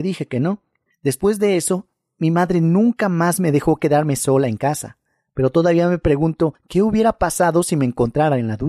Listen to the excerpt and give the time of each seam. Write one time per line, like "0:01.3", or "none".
none